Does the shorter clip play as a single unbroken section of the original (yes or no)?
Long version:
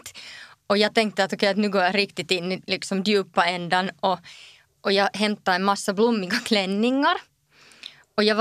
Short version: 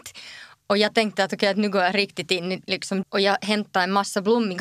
no